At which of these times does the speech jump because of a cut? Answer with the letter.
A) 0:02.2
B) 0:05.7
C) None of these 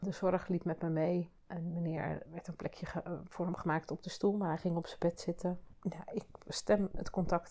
A